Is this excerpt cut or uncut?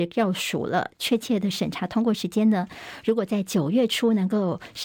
uncut